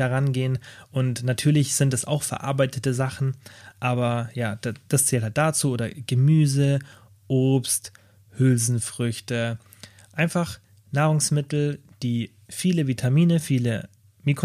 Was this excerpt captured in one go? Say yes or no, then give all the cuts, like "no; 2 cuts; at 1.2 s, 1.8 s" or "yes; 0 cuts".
yes; 0 cuts